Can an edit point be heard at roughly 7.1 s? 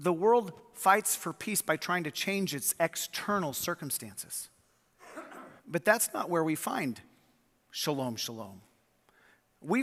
no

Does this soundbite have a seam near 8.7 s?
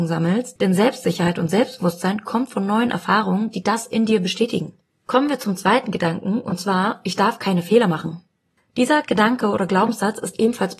no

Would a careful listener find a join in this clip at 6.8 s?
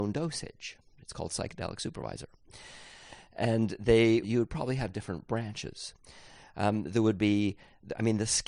no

